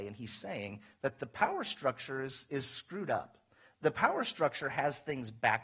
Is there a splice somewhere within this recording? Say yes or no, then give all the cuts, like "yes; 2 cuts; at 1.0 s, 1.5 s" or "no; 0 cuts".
no; 0 cuts